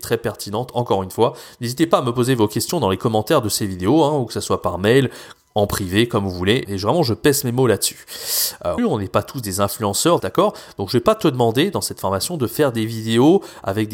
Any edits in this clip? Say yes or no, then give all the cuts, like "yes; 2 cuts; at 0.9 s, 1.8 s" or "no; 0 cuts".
yes; 3 cuts; at 6.6 s, 8.8 s, 10.2 s